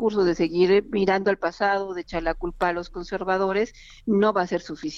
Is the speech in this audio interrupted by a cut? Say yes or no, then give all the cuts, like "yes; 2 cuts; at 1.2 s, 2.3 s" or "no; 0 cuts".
no; 0 cuts